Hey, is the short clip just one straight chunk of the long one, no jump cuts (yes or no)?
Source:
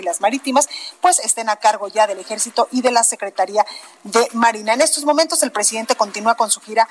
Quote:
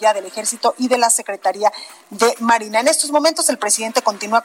yes